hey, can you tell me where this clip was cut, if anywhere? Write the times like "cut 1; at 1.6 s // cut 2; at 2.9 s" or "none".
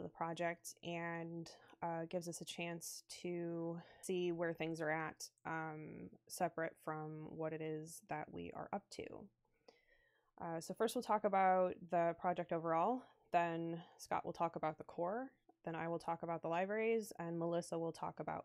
cut 1; at 4.0 s